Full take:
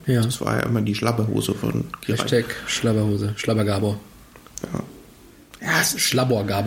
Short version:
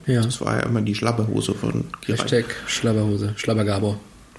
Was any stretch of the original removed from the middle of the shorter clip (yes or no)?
no